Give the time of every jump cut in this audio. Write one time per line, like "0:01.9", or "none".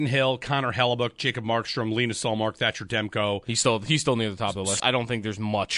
0:04.8